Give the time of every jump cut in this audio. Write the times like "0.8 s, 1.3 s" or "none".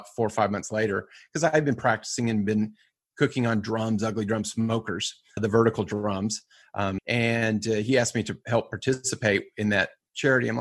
7.0 s